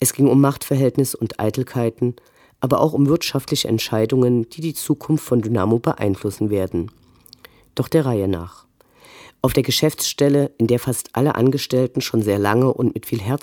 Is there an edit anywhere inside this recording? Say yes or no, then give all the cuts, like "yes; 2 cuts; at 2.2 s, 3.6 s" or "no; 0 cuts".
no; 0 cuts